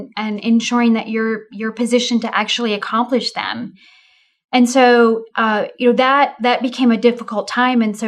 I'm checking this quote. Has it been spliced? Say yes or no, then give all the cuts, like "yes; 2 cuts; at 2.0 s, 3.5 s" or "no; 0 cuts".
no; 0 cuts